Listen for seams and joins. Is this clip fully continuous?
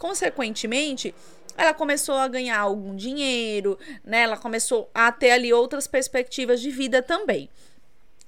yes; 0 cuts

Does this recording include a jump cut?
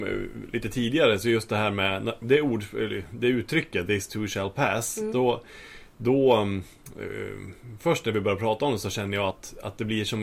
no; 0 cuts

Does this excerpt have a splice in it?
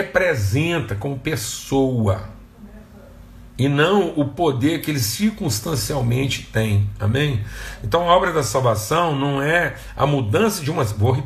no; 0 cuts

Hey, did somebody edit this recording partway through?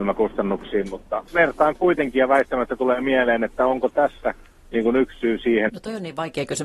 yes; 2 cuts; at 1.3 s, 5.7 s

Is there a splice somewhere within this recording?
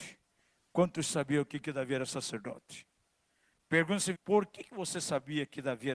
yes; 1 cut; at 4.1 s

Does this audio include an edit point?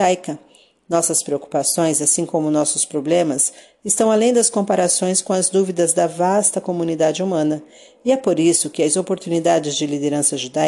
no; 0 cuts

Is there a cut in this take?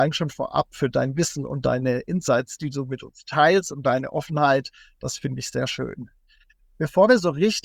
no; 0 cuts

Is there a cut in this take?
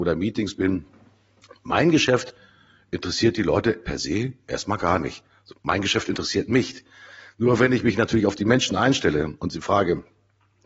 no; 0 cuts

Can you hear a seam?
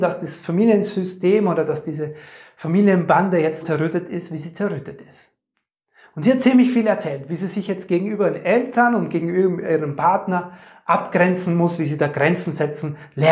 yes; 1 cut; at 3.6 s

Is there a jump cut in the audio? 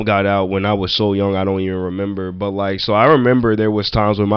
no; 0 cuts

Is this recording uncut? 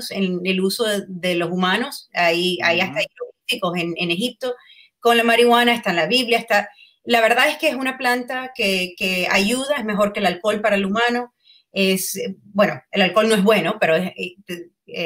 yes; 0 cuts

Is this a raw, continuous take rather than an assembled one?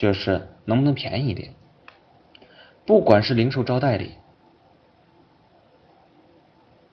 yes; 0 cuts

